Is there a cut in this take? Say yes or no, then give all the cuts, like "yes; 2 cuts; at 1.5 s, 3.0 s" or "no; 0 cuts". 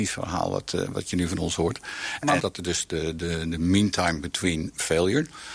yes; 1 cut; at 2.4 s